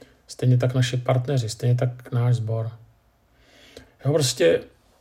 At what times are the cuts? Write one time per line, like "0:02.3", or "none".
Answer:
0:03.9